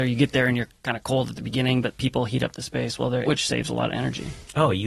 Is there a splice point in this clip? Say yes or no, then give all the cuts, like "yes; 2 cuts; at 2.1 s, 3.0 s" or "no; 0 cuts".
yes; 1 cut; at 3.3 s